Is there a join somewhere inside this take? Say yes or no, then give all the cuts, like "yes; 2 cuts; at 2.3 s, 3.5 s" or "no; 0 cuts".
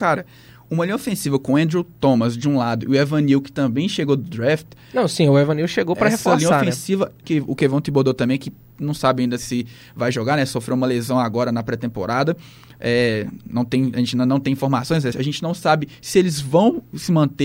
yes; 2 cuts; at 7.2 s, 15.1 s